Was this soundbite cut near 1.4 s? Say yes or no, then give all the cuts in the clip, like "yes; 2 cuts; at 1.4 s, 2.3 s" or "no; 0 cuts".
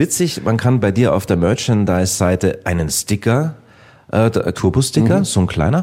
no; 2 cuts; at 2.6 s, 4.5 s